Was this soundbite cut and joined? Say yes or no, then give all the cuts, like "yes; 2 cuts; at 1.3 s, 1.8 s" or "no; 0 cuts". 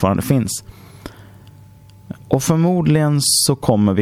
yes; 1 cut; at 2.1 s